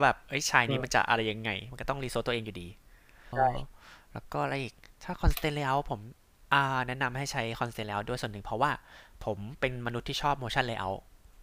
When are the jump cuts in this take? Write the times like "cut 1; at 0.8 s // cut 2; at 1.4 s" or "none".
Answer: cut 1; at 3.3 s